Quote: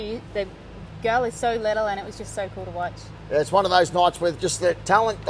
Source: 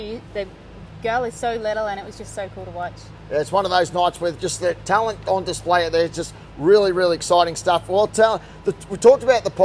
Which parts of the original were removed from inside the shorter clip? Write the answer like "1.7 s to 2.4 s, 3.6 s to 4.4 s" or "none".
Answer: none